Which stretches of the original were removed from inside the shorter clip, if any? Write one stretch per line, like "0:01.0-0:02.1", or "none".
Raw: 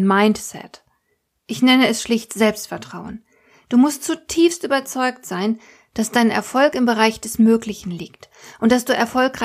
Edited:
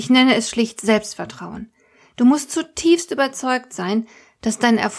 none